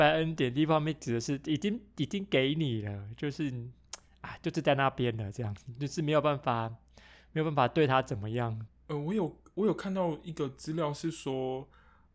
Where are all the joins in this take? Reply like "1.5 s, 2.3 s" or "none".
8.7 s